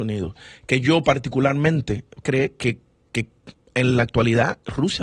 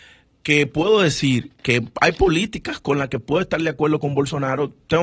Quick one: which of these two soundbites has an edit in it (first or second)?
first